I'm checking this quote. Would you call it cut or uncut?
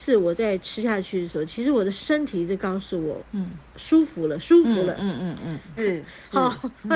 cut